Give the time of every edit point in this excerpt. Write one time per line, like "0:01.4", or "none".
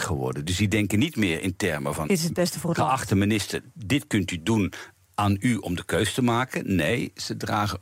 0:02.0